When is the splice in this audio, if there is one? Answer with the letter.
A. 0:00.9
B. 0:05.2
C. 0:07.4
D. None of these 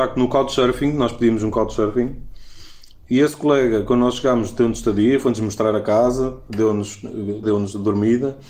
C